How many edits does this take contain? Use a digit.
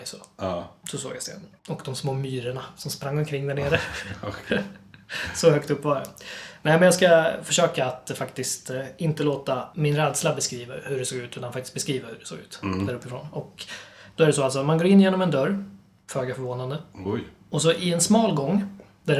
1